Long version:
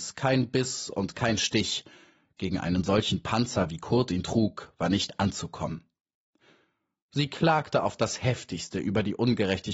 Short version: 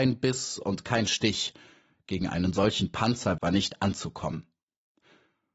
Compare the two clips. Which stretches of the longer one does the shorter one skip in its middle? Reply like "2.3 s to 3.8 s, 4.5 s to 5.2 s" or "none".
3.7 s to 4.8 s